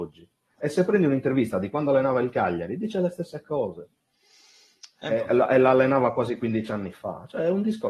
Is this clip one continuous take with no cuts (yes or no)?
yes